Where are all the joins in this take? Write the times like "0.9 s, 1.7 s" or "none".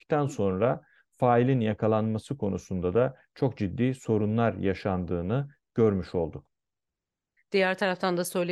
7.4 s